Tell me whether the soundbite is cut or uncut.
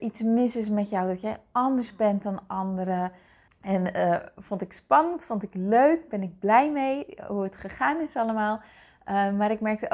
cut